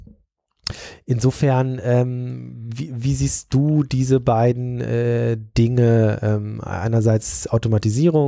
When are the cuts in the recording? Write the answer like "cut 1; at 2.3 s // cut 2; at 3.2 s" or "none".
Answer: none

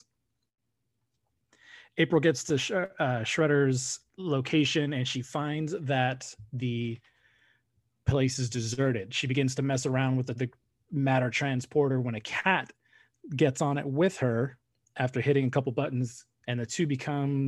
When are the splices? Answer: cut 1; at 4.1 s // cut 2; at 10.3 s // cut 3; at 16.4 s

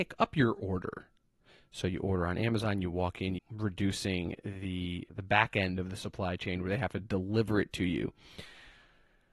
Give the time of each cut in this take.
cut 1; at 3.4 s // cut 2; at 5.1 s

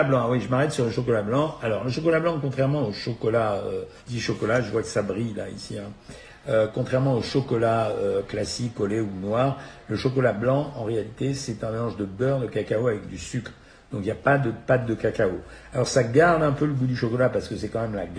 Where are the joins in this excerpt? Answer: cut 1; at 4.0 s

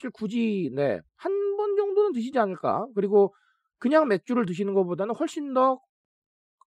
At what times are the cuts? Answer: cut 1; at 1.1 s

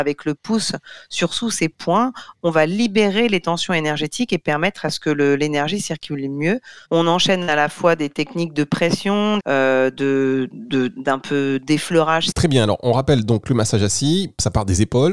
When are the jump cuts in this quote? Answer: cut 1; at 6.8 s // cut 2; at 9.4 s // cut 3; at 12.3 s

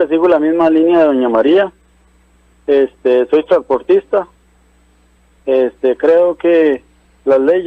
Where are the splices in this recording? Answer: none

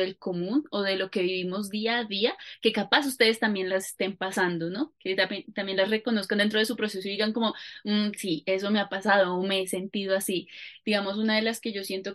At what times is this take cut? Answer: none

